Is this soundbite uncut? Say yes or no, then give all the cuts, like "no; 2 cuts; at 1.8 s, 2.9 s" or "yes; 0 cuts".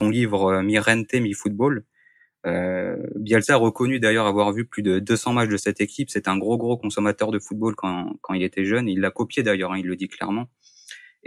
yes; 0 cuts